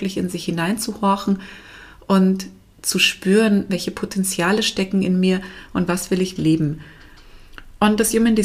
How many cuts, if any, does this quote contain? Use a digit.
2